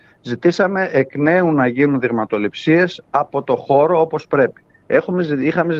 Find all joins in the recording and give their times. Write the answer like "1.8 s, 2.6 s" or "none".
4.7 s